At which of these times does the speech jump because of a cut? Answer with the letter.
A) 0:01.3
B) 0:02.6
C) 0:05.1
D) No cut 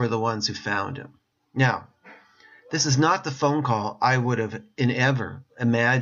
A